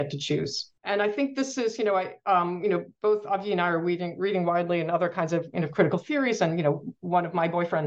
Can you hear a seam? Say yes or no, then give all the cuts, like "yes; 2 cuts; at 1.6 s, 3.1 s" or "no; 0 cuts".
no; 0 cuts